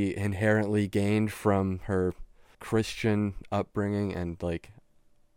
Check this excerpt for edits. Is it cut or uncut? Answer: cut